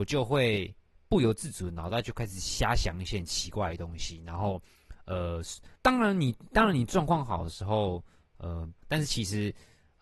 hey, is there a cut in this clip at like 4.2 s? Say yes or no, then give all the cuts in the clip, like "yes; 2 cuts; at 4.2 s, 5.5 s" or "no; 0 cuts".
no; 2 cuts; at 5.8 s, 8.8 s